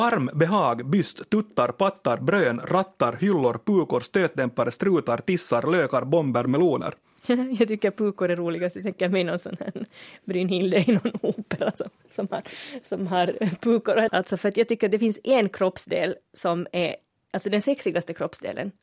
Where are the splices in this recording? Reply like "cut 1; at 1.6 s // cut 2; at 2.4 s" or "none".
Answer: cut 1; at 14.1 s // cut 2; at 16.3 s